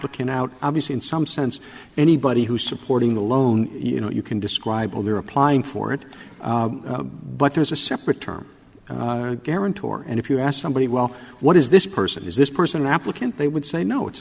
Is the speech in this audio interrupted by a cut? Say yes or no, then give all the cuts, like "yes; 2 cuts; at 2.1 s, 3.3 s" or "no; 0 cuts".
no; 0 cuts